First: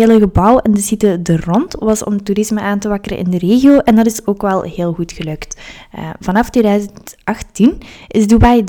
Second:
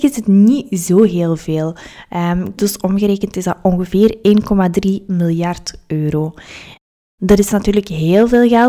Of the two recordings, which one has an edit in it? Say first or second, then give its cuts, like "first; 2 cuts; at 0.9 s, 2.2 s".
second; 1 cut; at 2.6 s